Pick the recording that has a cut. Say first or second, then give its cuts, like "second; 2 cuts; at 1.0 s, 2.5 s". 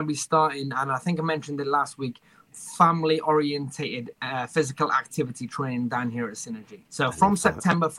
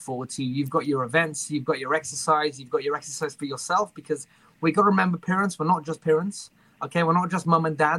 first; 1 cut; at 6.8 s